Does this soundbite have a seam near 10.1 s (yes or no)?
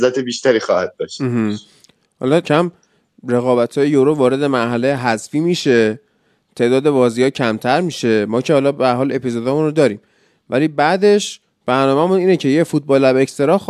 no